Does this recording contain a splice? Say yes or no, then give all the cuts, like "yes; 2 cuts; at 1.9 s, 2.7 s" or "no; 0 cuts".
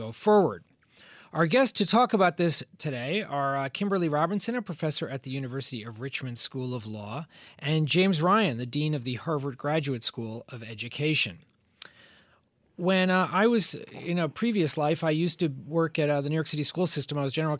no; 0 cuts